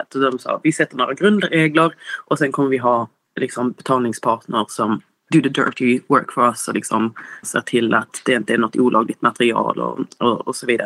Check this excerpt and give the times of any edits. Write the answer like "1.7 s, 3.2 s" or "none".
none